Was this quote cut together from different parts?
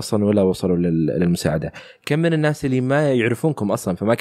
no; 0 cuts

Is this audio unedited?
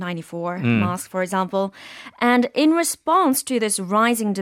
yes; 0 cuts

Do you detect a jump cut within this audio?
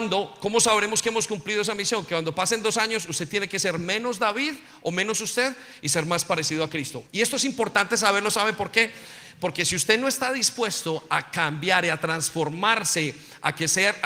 yes; 1 cut; at 7.1 s

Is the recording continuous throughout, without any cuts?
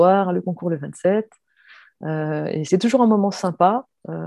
no; 1 cut; at 2.7 s

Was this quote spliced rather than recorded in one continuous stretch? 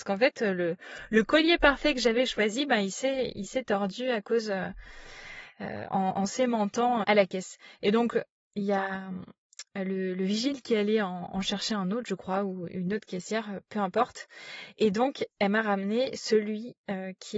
yes; 1 cut; at 7.0 s

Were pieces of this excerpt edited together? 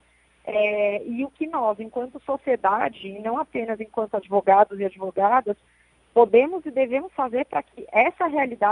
no; 0 cuts

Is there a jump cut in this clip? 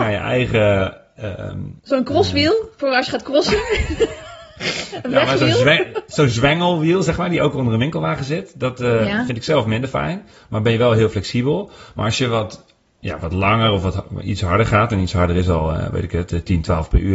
no; 0 cuts

